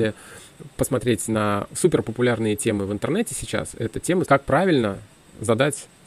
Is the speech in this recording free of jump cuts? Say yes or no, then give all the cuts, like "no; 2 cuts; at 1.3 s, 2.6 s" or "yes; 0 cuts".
no; 1 cut; at 4.3 s